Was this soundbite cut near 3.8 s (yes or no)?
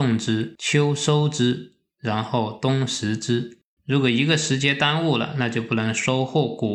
yes